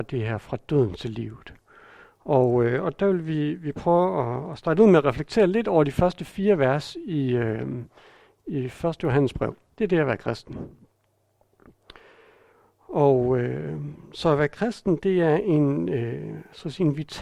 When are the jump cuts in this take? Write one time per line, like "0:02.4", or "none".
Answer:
0:09.7